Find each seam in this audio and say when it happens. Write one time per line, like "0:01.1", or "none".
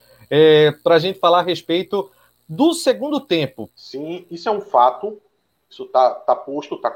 0:03.7